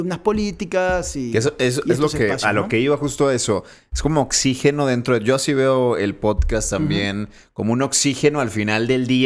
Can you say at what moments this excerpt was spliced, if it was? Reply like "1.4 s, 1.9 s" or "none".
none

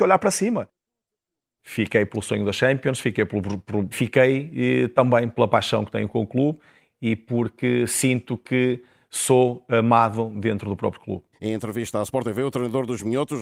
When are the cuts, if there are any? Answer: 1.6 s, 3.9 s, 11.3 s

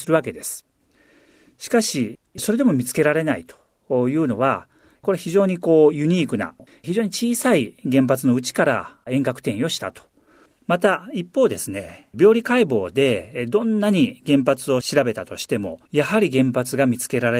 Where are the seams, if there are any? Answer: 6.7 s, 10.5 s, 15.9 s

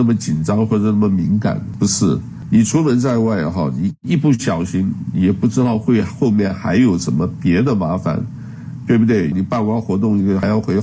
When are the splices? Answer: 9.3 s

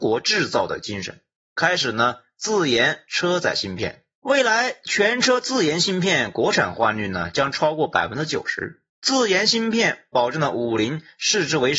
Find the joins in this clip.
4.2 s, 8.9 s

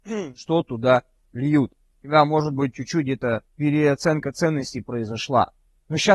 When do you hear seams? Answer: 1.9 s, 3.5 s

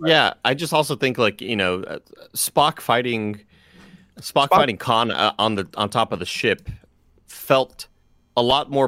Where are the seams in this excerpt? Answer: 4.1 s

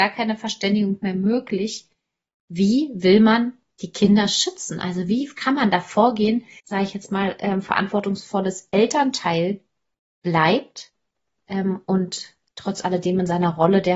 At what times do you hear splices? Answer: 6.6 s

